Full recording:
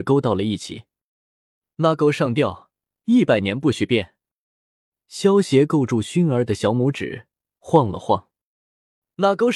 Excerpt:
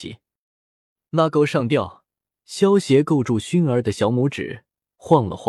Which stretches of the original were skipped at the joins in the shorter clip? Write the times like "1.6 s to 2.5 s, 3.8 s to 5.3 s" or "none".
2.9 s to 4.9 s